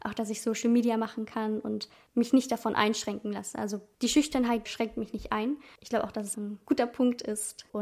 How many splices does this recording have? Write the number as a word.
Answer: two